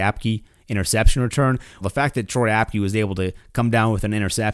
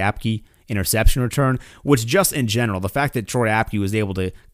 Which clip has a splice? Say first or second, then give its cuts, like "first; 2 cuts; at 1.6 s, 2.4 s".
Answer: first; 1 cut; at 1.8 s